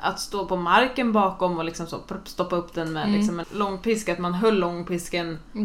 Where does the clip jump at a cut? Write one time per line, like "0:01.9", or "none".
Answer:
0:03.4